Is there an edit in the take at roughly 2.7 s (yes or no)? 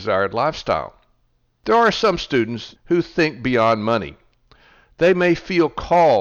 yes